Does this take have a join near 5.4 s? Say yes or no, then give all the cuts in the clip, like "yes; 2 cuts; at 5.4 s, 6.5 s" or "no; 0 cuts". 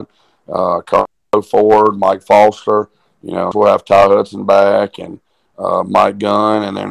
no; 1 cut; at 3.5 s